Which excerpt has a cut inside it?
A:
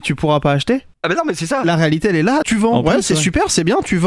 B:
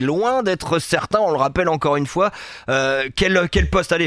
A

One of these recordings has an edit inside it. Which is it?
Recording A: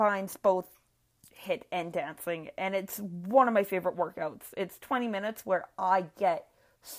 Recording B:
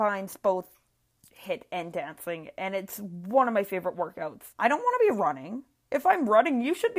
B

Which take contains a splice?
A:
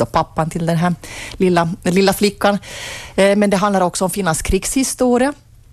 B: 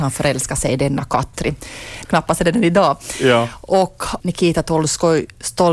B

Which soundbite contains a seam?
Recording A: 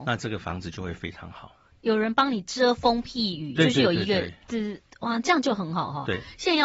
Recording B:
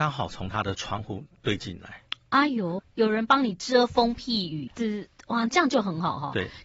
B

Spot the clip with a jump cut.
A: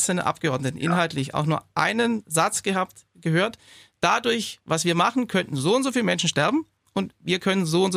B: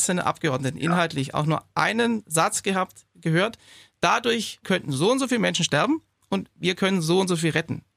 B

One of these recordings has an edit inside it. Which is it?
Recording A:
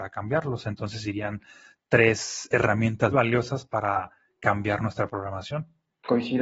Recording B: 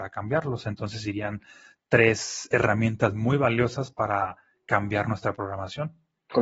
A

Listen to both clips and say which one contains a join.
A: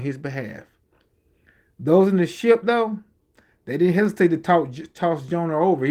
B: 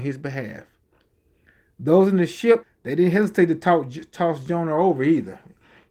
B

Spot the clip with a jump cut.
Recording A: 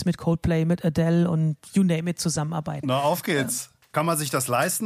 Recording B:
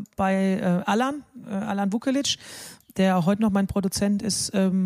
A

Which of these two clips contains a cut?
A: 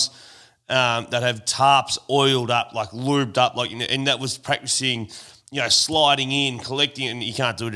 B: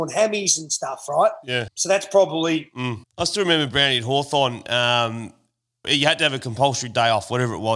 B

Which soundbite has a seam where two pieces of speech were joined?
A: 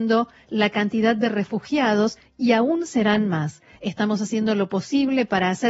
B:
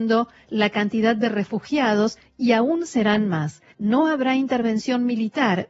B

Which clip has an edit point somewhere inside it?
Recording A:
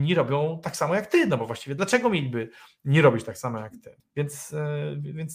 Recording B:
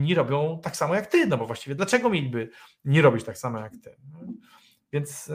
A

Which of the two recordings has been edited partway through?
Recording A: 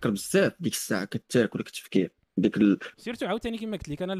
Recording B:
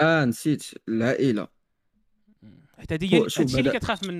A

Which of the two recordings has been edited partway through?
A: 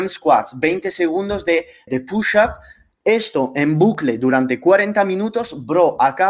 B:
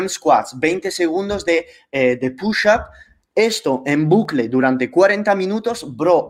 A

